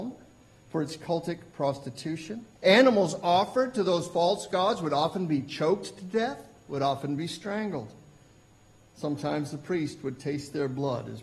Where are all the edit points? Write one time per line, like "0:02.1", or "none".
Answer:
0:02.5